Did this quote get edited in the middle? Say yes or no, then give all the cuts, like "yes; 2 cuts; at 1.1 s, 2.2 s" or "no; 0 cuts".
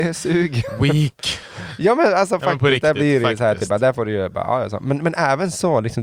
no; 0 cuts